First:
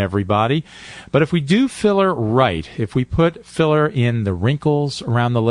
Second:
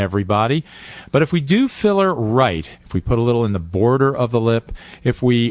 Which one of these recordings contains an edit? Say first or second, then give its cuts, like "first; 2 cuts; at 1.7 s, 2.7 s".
second; 1 cut; at 2.7 s